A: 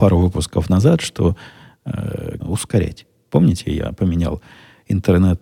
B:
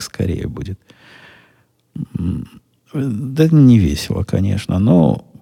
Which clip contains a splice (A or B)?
A